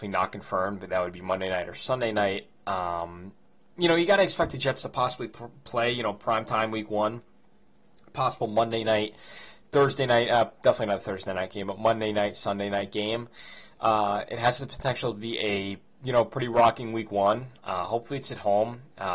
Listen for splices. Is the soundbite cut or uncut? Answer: uncut